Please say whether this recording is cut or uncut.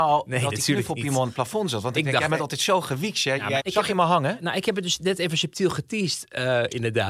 cut